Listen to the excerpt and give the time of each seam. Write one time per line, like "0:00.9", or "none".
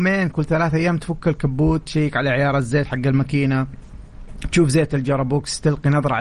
none